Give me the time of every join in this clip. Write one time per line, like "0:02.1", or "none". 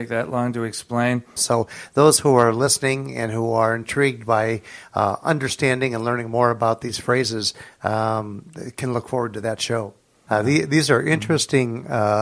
0:01.4
0:10.3